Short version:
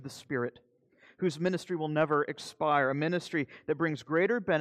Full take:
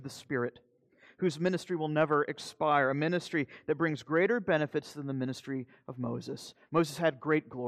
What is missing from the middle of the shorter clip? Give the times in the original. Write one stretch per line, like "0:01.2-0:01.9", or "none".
none